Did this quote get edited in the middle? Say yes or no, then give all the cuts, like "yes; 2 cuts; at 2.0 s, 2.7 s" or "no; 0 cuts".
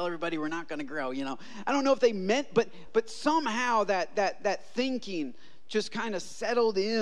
no; 0 cuts